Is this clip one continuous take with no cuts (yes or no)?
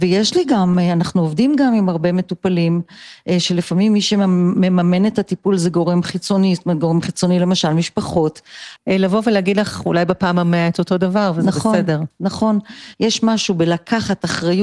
no